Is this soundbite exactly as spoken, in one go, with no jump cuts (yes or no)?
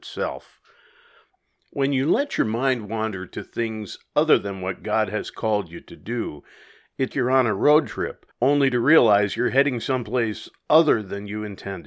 no